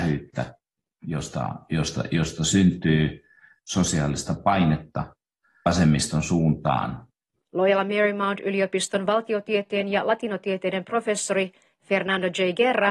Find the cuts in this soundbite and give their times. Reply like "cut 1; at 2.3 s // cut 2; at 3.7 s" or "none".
cut 1; at 7.4 s